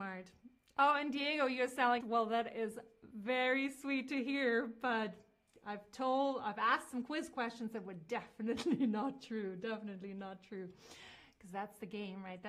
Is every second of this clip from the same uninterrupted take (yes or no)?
no